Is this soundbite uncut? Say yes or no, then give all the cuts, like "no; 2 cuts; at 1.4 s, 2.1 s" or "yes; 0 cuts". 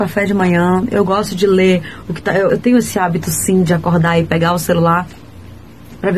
no; 1 cut; at 2.5 s